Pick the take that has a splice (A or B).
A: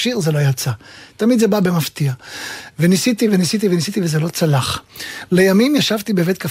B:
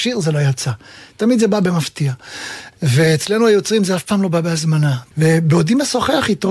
B